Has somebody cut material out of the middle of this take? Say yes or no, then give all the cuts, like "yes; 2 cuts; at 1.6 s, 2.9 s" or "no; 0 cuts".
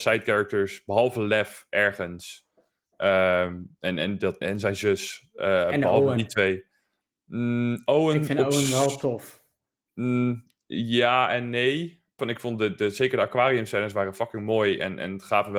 yes; 2 cuts; at 4.4 s, 12.2 s